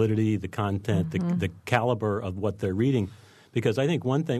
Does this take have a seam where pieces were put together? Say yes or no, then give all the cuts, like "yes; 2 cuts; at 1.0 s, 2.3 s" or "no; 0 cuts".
no; 0 cuts